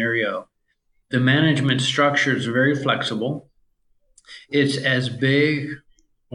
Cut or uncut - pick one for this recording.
uncut